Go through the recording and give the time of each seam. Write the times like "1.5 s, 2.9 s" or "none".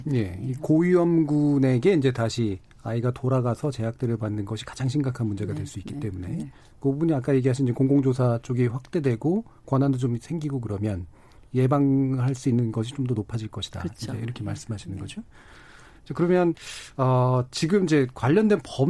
none